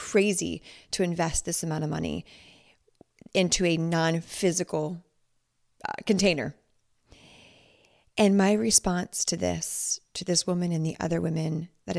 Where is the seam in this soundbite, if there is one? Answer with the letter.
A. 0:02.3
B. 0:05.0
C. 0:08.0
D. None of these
D